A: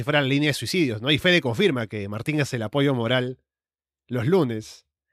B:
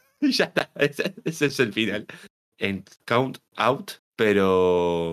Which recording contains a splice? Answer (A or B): B